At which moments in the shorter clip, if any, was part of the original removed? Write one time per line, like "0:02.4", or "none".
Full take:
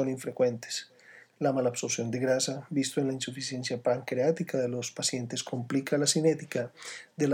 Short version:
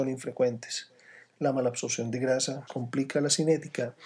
0:02.7